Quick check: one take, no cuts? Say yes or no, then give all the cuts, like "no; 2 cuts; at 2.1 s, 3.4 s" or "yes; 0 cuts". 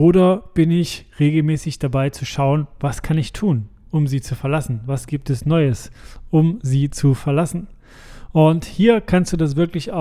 yes; 0 cuts